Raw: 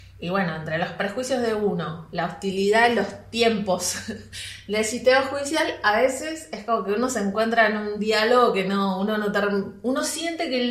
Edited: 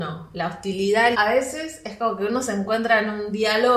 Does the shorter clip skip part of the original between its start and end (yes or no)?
yes